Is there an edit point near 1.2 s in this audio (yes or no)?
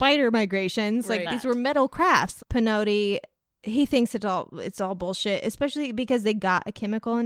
yes